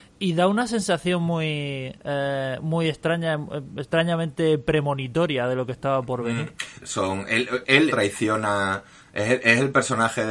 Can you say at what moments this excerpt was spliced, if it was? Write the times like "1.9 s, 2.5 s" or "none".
6.8 s, 7.9 s

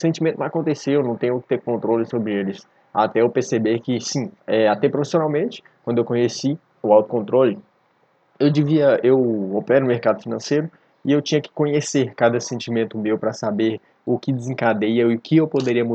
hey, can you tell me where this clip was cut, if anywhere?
4.4 s

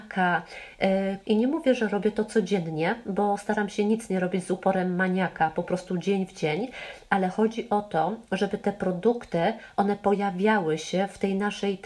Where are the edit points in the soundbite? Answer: 1.2 s

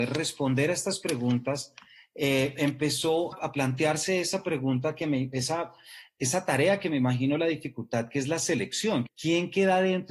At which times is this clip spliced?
3.3 s, 9.1 s

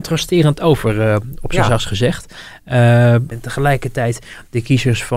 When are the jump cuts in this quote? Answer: 3.3 s

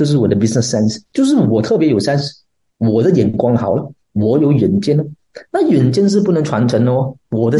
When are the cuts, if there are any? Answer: none

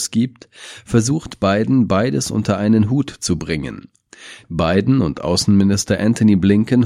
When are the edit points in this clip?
4.4 s

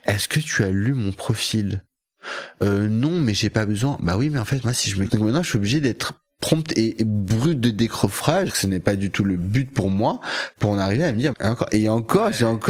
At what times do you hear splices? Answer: 5.1 s, 8.5 s, 11.3 s

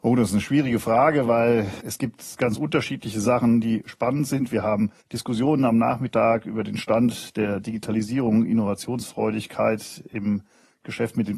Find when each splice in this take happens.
5.0 s

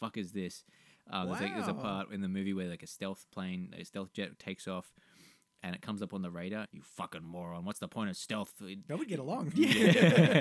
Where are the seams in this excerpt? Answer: 6.6 s, 8.9 s

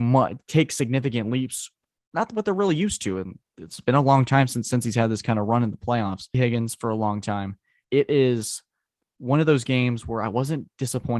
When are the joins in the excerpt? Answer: 6.3 s, 7.8 s

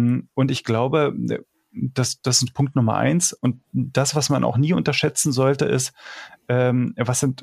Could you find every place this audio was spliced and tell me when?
none

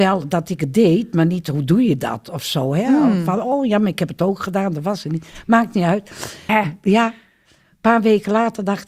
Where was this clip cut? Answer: 6.5 s

